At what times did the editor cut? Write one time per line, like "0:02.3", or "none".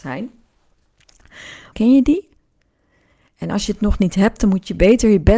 0:01.7